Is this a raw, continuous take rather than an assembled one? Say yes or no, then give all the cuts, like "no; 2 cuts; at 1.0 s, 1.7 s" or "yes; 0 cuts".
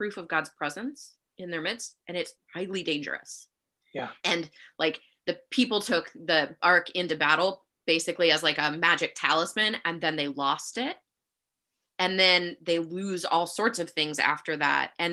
no; 2 cuts; at 2.4 s, 4.2 s